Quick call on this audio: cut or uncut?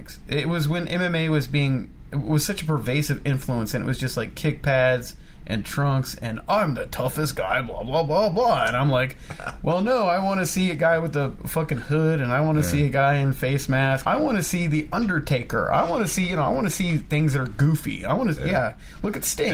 cut